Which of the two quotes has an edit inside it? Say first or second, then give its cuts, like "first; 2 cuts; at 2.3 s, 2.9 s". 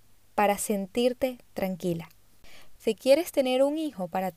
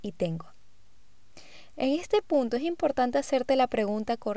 first; 1 cut; at 2.7 s